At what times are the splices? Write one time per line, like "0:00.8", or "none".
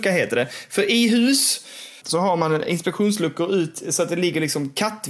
0:02.0